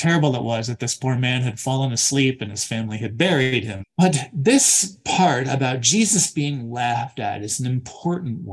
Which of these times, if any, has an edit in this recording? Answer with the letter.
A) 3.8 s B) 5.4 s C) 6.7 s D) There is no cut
A